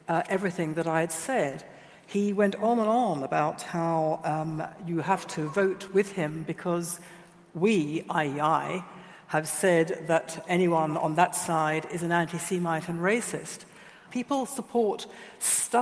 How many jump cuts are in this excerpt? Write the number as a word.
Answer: one